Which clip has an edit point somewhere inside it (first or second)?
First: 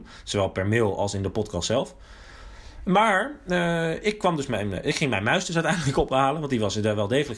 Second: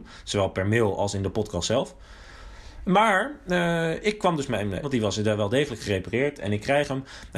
second